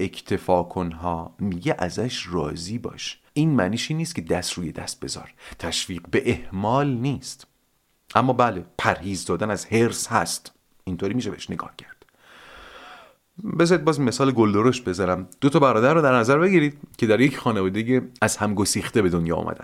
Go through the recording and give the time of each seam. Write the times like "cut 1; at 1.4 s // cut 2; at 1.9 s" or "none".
cut 1; at 3.3 s